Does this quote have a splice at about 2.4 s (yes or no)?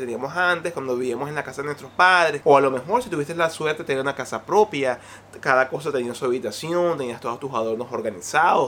yes